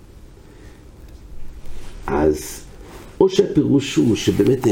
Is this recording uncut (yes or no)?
yes